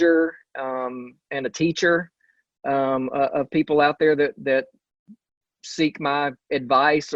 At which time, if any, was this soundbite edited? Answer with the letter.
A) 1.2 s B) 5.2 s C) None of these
C